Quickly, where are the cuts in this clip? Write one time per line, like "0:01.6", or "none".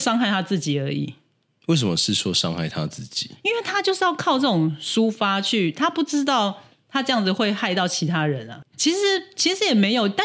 0:08.6

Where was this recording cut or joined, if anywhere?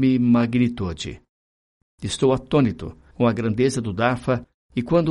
0:01.8

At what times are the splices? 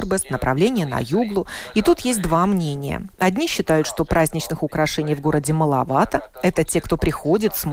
none

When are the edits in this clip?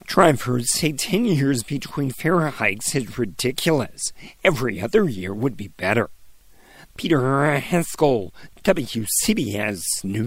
none

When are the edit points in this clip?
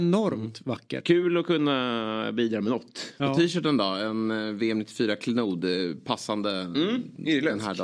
none

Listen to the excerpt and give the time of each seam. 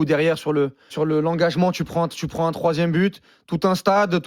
0:00.9

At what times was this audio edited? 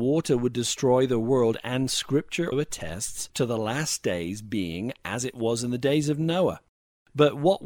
0:02.5

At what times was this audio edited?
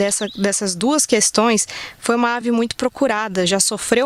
none

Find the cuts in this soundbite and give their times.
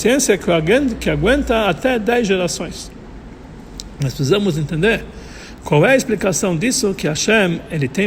none

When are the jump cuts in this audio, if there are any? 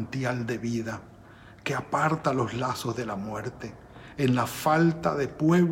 0:04.1

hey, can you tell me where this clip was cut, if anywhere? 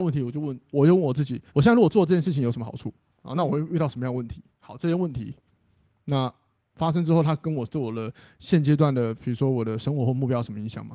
0:01.5

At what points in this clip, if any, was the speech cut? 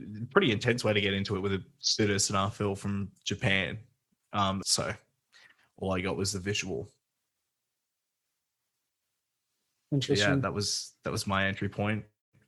0:04.6

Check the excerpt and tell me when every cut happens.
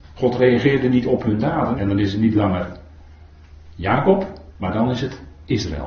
0:01.8
0:04.5

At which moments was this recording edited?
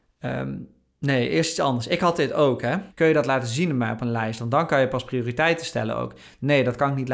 0:02.9

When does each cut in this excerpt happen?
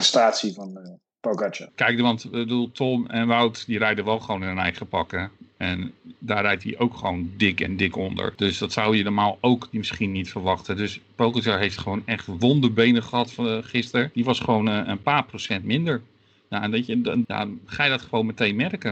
0:14.1
0:17.2

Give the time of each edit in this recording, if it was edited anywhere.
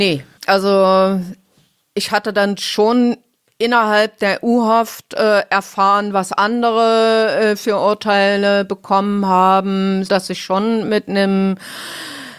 0:10.1

